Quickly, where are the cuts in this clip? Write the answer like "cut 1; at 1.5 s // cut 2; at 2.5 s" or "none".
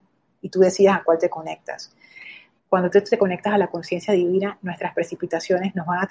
cut 1; at 2.6 s